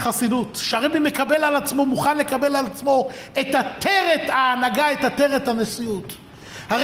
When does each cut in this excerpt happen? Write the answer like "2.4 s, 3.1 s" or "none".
none